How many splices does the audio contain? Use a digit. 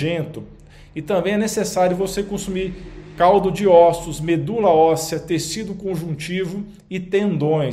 0